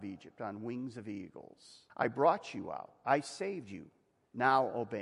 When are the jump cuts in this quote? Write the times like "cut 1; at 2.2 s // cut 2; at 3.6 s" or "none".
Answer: cut 1; at 1.9 s